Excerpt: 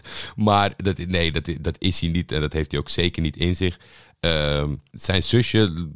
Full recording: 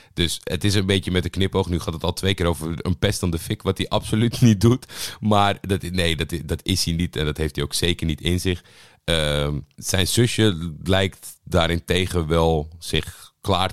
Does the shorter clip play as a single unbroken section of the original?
yes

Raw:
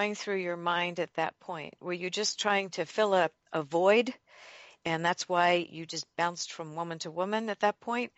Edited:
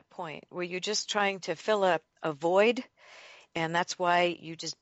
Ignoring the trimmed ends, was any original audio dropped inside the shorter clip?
no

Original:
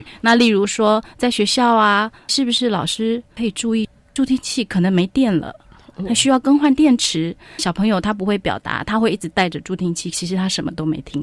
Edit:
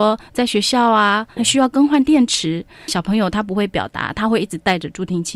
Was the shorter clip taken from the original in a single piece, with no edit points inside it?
no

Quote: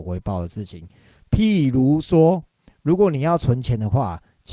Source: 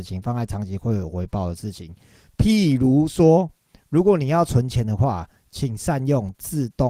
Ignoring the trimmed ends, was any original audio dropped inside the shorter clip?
no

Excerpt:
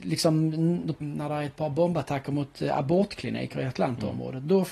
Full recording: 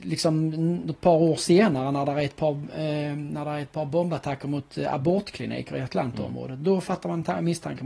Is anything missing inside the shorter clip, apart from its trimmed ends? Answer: yes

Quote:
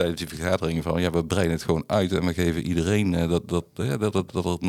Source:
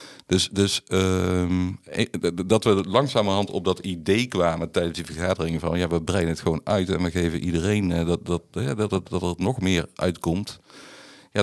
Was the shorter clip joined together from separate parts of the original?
no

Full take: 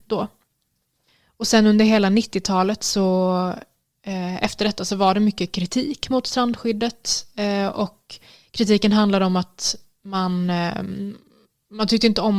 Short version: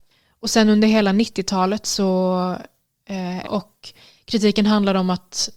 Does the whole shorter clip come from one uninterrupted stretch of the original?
no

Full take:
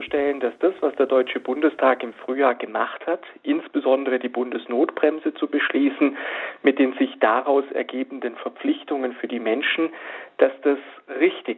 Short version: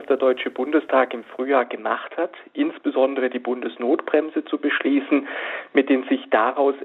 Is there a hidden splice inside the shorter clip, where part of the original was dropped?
no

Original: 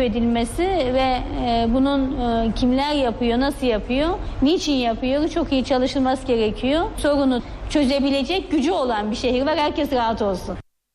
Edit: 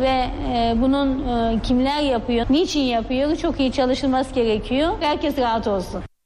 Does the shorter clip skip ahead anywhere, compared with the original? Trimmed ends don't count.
yes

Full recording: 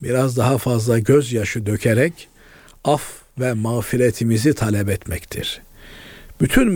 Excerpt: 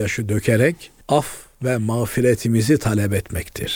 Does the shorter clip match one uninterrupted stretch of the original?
no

